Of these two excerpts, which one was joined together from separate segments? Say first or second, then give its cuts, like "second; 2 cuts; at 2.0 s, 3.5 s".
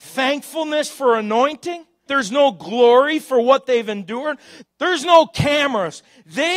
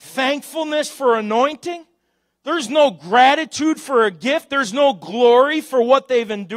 first; 2 cuts; at 2.1 s, 4.7 s